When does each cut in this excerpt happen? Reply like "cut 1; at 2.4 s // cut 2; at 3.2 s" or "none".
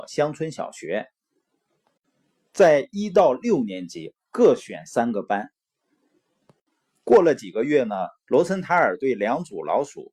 cut 1; at 6.0 s